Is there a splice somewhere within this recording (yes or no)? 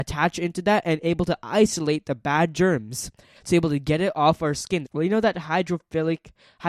yes